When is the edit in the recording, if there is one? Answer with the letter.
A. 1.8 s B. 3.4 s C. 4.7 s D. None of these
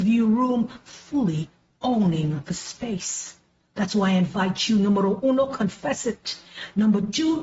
D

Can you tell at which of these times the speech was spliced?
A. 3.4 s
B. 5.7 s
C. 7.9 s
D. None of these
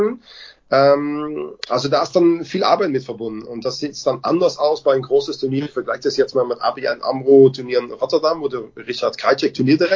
D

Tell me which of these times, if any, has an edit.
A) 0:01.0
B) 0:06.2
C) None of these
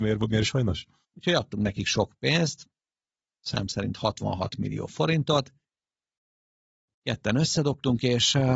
A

